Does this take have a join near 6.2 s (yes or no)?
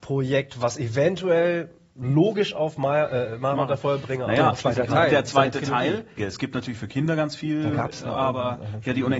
yes